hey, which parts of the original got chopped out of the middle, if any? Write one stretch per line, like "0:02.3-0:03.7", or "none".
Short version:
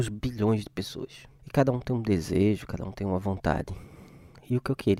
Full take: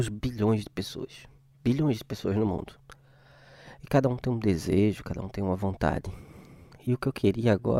0:01.4-0:03.8